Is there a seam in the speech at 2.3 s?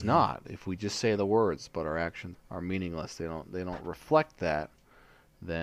yes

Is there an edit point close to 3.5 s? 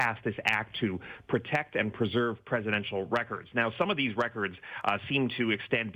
no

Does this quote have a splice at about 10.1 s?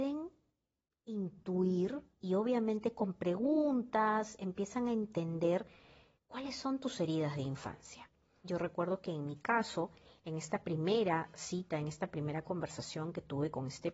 no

